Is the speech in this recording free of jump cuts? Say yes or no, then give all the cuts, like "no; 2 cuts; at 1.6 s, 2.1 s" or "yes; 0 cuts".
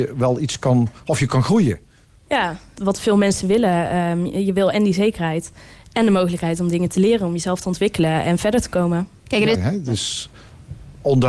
no; 2 cuts; at 2.8 s, 9.5 s